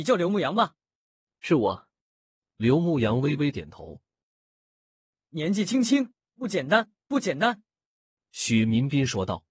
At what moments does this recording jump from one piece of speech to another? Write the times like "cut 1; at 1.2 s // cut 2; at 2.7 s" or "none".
cut 1; at 6.3 s